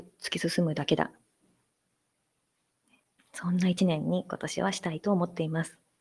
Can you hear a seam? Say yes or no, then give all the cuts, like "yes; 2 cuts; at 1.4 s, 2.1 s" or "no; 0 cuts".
yes; 1 cut; at 3.2 s